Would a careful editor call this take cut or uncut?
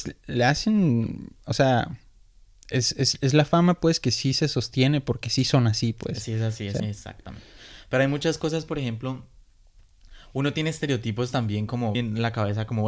cut